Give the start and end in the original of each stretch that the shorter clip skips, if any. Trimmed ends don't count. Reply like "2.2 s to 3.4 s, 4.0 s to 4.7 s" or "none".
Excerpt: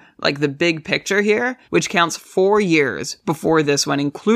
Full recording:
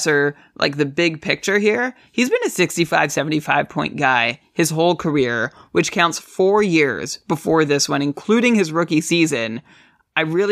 2.0 s to 5.7 s

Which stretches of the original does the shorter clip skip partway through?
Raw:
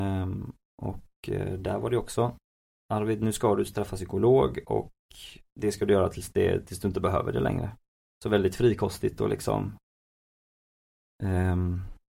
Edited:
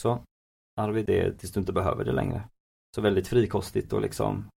3.2 s to 6.3 s

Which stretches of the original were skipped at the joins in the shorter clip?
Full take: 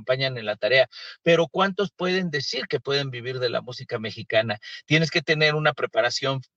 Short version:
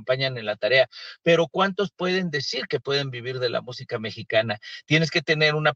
none

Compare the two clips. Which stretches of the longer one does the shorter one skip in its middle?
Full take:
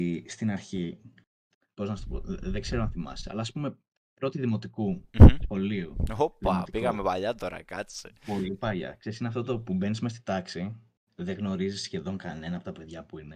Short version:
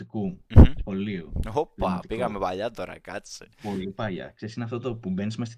none

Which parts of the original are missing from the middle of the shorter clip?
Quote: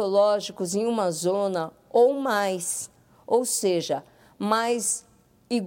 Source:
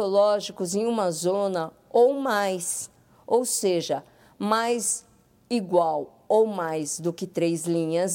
none

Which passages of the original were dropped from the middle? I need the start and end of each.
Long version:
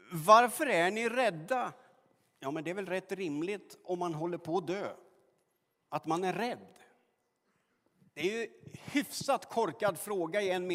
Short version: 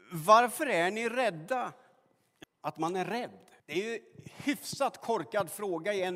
2.4 s to 5.7 s, 6.9 s to 8.1 s

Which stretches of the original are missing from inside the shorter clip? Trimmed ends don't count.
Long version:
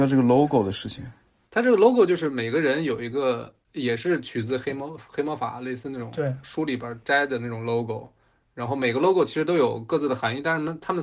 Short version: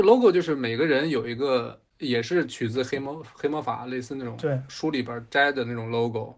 none

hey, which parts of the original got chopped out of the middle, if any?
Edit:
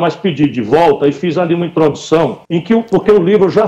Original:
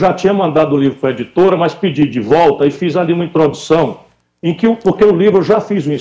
4.0 s to 4.4 s

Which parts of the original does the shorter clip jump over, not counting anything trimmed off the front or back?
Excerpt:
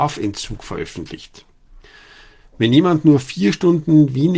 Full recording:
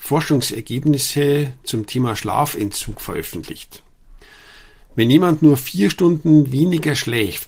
none

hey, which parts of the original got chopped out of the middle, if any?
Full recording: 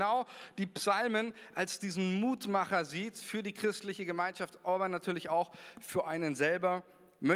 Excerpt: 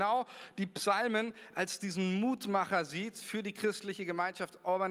none

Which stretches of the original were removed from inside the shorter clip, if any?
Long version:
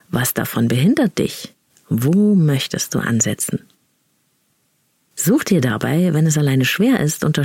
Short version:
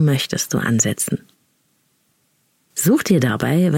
none

